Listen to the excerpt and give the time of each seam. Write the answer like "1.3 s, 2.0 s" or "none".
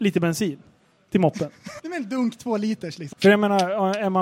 1.8 s, 3.1 s